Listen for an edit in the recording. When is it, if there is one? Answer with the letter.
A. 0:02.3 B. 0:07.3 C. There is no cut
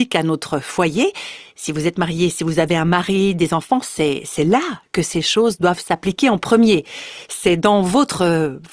C